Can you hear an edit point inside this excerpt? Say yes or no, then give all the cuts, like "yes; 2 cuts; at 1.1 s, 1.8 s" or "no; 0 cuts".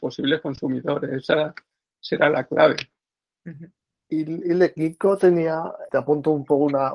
yes; 1 cut; at 5.9 s